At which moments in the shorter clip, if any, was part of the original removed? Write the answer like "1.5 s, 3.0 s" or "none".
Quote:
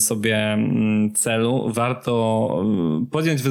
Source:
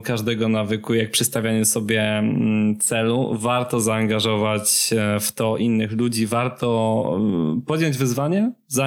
1.7 s

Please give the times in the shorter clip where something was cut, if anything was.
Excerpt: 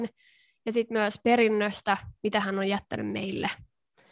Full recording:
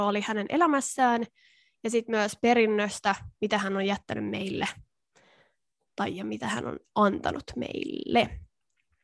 none

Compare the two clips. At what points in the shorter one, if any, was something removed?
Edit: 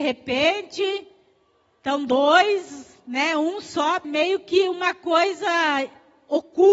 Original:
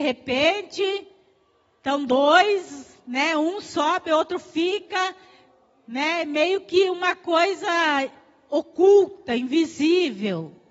4.0 s

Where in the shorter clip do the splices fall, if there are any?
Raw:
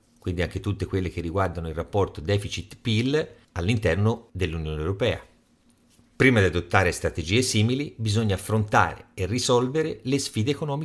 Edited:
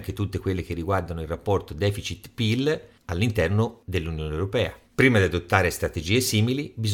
4.9 s

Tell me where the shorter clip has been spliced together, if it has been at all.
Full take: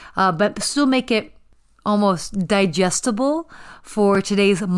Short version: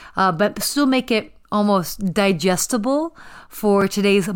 1.4 s

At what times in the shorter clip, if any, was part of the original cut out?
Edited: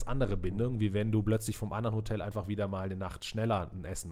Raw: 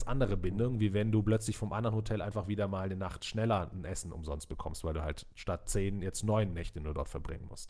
none

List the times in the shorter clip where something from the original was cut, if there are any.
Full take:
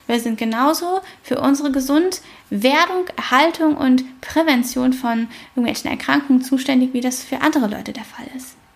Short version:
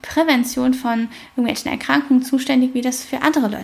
none

